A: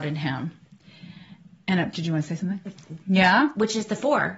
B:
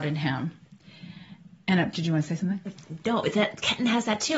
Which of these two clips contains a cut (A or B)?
A